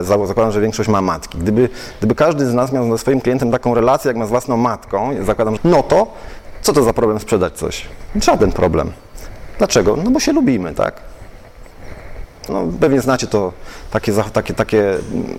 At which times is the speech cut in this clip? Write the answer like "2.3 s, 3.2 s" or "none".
5.6 s, 12.5 s